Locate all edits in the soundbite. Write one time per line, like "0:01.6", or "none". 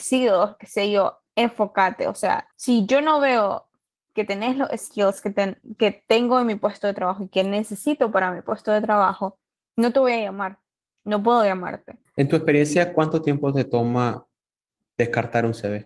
0:12.1